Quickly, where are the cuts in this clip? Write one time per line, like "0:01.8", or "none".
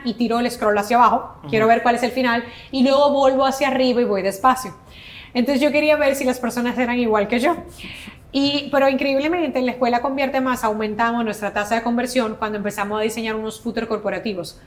none